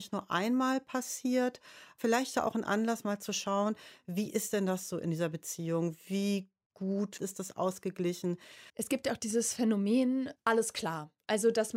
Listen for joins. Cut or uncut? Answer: cut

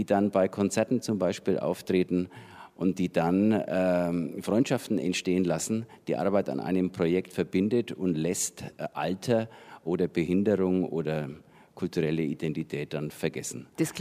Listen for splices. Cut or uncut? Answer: uncut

